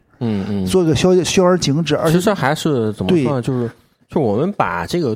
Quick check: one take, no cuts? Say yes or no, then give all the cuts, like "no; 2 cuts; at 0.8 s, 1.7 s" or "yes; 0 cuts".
yes; 0 cuts